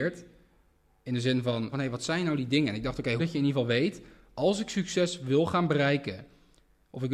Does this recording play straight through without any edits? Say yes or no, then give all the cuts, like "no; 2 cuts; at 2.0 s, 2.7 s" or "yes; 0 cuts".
no; 2 cuts; at 1.7 s, 3.2 s